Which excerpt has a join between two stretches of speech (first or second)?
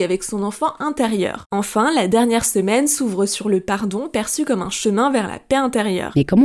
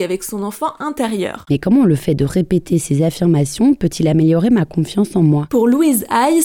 second